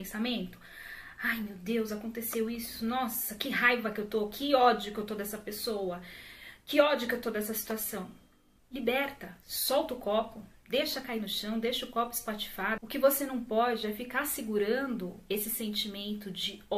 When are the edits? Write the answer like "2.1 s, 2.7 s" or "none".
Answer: 8.6 s, 12.8 s